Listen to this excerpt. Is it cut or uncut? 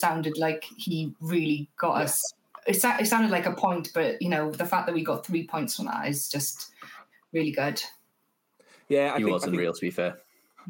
uncut